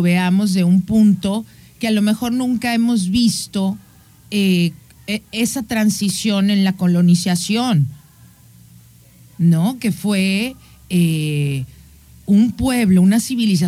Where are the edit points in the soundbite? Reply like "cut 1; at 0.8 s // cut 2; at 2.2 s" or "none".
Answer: none